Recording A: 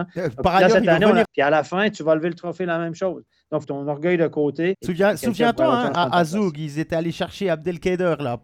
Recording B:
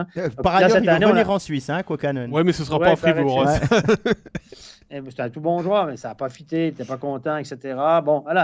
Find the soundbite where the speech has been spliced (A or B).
A